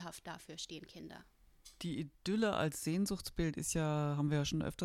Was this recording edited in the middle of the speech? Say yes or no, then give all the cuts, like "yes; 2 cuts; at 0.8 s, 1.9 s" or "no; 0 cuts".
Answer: no; 0 cuts